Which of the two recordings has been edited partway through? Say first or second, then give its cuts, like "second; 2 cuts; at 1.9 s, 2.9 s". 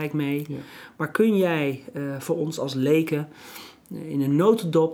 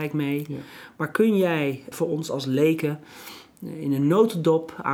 second; 1 cut; at 1.9 s